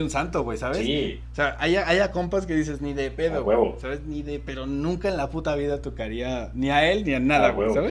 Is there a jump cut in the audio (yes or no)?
yes